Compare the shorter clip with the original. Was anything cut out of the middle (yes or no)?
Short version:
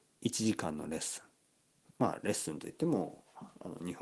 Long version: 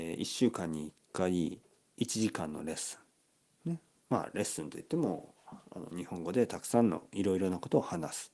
yes